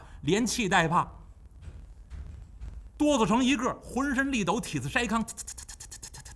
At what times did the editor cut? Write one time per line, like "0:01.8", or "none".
none